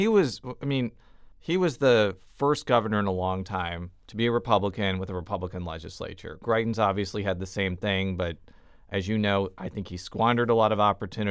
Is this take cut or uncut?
cut